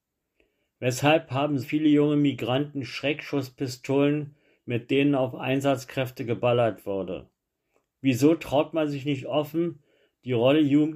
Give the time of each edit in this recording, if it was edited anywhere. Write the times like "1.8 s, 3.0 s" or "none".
1.6 s